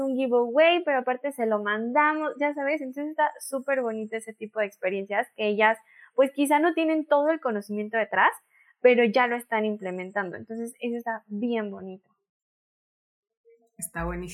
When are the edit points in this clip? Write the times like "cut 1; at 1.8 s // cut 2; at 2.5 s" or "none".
none